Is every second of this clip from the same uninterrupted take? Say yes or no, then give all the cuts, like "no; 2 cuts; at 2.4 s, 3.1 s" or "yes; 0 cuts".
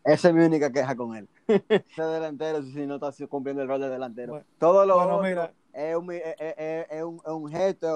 no; 1 cut; at 2.0 s